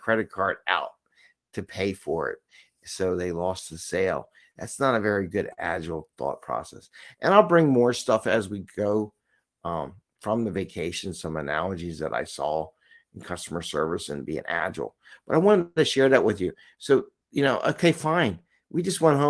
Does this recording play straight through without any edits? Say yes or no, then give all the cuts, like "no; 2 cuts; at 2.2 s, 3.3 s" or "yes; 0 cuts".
yes; 0 cuts